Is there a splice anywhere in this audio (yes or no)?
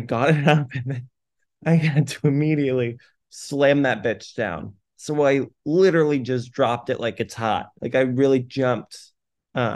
yes